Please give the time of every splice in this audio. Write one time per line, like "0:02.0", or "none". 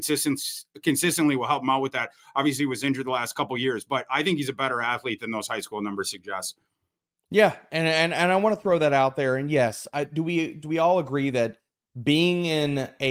none